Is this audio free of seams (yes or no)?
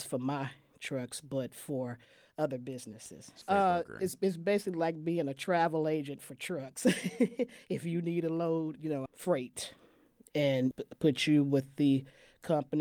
no